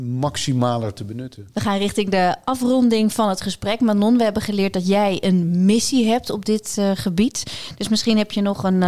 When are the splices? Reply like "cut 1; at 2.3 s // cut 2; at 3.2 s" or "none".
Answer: cut 1; at 1.5 s